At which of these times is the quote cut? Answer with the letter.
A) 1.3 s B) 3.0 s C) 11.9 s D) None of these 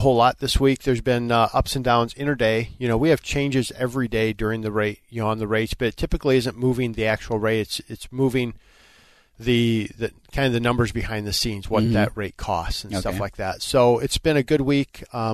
D